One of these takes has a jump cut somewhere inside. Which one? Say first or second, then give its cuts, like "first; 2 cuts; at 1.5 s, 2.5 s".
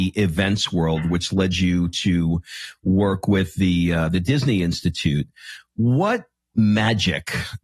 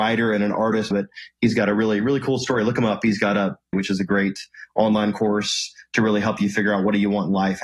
second; 2 cuts; at 0.9 s, 3.7 s